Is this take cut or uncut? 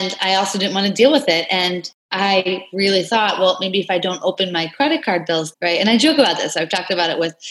cut